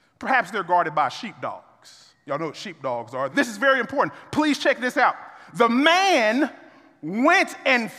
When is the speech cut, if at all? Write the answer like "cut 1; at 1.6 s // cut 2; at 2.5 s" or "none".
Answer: cut 1; at 3.3 s